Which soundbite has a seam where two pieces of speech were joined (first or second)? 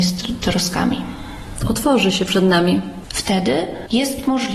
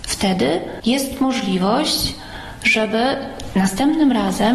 first